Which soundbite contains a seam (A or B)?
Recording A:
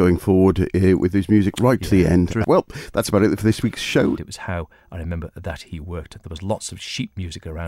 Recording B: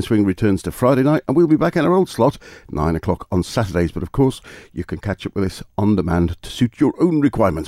A